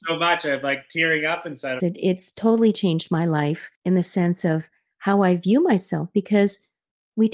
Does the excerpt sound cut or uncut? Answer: cut